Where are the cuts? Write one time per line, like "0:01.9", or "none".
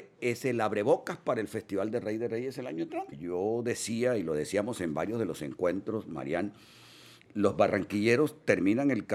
0:03.1
0:07.3